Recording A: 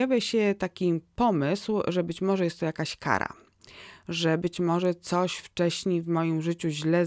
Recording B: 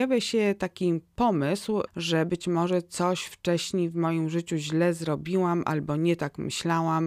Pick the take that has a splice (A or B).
B